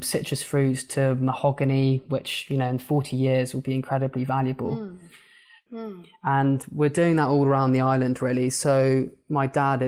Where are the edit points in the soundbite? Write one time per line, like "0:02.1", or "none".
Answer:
0:05.7